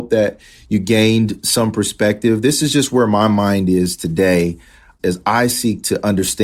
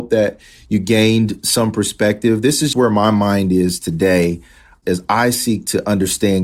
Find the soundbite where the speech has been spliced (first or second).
second